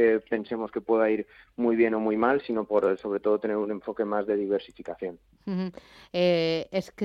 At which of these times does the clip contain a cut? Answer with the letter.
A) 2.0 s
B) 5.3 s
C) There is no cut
C